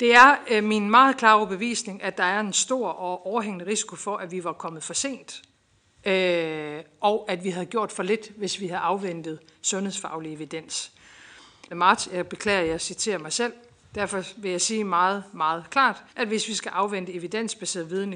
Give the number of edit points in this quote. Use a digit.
2